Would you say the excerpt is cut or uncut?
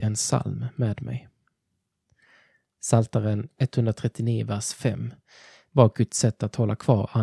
uncut